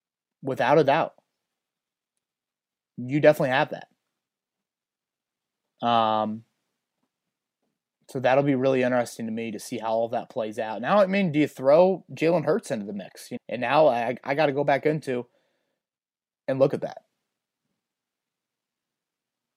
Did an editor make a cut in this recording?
yes; 1 cut; at 13.4 s

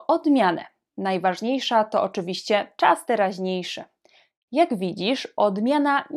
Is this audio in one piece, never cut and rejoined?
no; 1 cut; at 4.5 s

